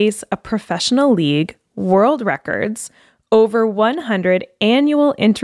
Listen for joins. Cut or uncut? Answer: uncut